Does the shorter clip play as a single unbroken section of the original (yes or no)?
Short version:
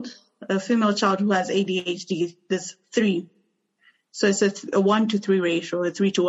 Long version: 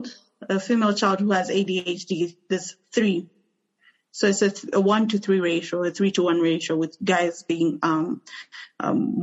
yes